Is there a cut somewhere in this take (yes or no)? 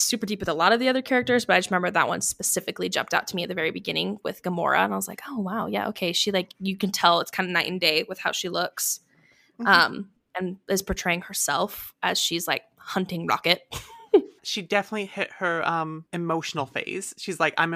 yes